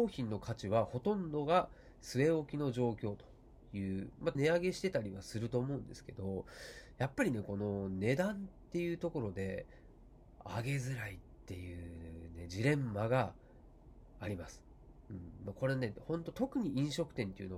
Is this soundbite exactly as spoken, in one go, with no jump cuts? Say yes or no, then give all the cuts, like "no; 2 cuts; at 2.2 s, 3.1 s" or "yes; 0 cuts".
no; 1 cut; at 4.4 s